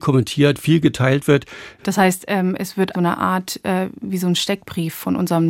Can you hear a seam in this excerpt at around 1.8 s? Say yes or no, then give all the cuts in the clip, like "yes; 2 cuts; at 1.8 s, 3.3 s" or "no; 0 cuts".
yes; 2 cuts; at 1.8 s, 2.9 s